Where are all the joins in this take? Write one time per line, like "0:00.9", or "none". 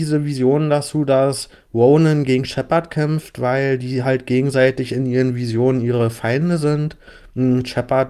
none